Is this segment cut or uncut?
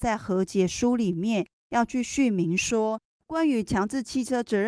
cut